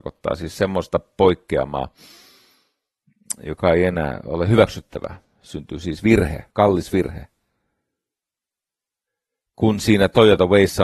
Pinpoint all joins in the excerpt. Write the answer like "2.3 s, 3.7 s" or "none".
6.5 s